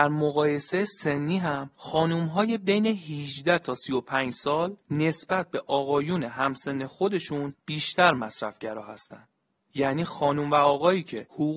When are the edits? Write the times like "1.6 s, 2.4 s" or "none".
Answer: 9.6 s